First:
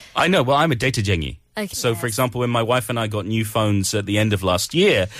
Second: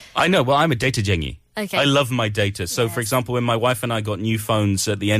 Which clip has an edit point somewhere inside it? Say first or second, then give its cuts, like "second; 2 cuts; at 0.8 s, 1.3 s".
first; 1 cut; at 1.7 s